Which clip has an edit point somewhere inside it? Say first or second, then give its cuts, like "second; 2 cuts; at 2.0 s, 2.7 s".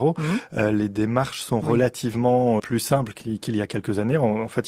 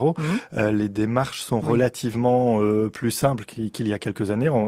first; 1 cut; at 2.6 s